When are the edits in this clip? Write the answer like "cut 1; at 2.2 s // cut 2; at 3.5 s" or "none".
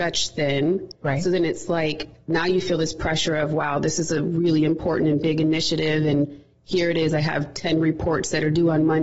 none